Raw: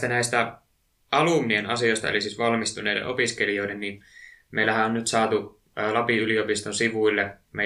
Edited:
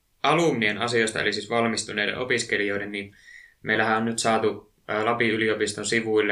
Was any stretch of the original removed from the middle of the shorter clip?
no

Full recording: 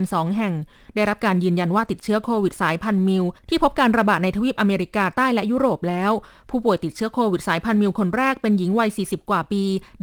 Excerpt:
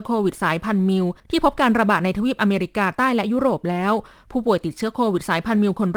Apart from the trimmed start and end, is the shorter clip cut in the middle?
no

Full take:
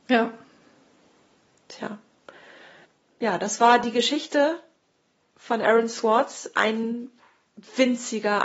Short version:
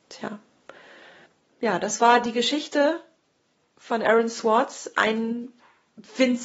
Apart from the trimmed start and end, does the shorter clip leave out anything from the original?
no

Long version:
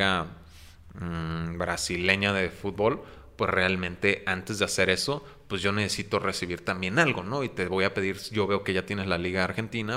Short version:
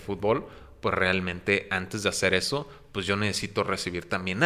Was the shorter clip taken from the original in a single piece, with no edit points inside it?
yes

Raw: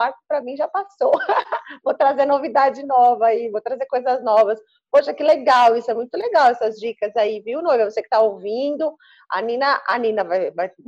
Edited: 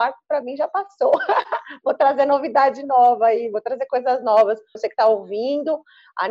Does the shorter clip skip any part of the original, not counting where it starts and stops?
yes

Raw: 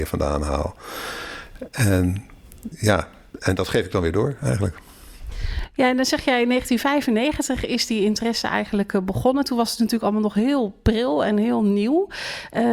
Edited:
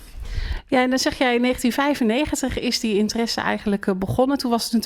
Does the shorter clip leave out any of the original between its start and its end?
no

